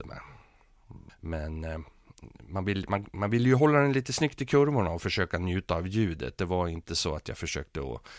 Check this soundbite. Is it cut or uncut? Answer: cut